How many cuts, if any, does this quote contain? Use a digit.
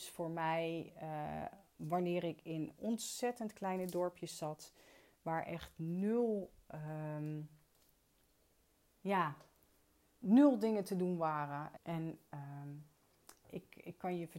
2